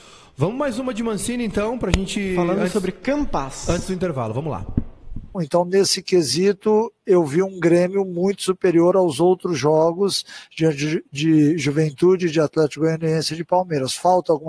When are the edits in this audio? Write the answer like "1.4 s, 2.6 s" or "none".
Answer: 5.3 s